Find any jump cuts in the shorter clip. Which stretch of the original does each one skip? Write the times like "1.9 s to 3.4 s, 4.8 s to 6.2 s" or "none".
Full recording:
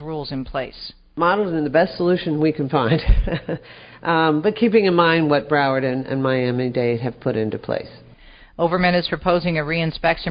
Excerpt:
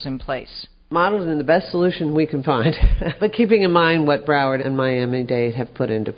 3.5 s to 4.4 s, 5.8 s to 6.1 s